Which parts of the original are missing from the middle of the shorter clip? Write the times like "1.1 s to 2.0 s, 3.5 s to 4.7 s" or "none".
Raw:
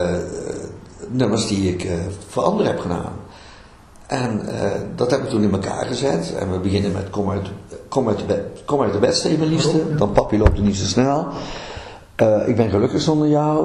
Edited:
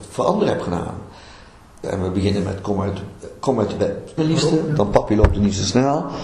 4.0 s to 6.3 s, 8.7 s to 9.4 s